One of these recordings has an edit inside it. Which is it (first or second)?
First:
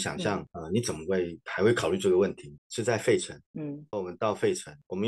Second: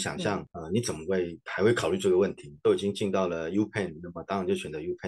first